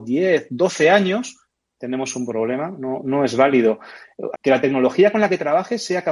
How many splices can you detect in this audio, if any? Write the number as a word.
one